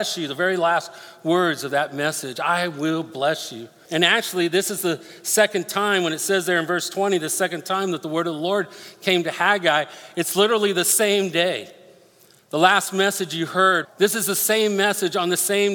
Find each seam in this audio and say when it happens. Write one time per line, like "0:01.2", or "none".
0:03.8
0:13.8

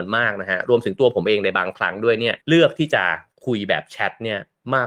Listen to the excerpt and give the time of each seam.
0:02.4

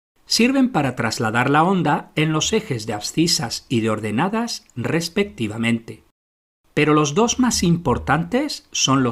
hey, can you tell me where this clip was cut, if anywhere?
0:06.6

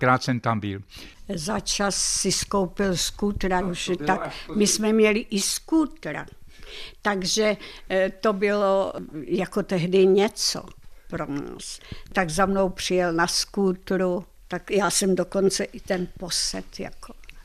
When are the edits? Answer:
0:03.6

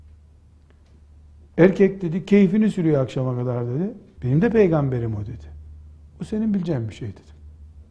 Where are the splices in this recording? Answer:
0:04.2

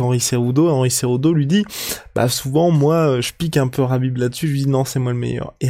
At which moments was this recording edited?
none

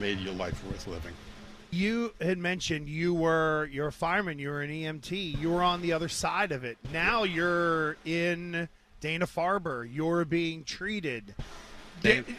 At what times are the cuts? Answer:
none

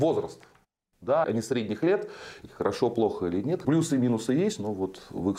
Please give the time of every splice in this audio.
0:01.2
0:02.4
0:03.6

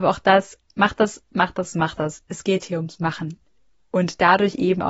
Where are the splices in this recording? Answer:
none

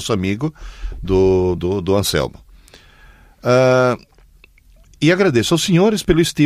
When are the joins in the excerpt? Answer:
none

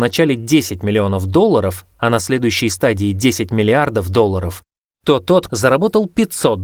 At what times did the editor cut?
0:05.5

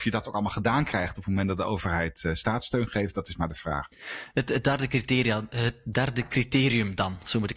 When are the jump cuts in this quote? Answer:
none

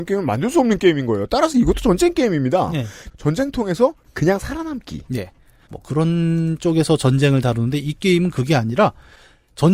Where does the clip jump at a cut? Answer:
0:05.7

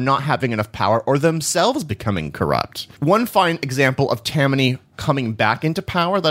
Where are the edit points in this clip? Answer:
0:02.9

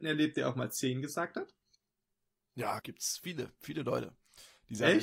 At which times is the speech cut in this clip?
0:02.8

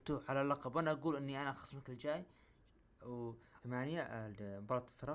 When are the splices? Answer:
0:03.6

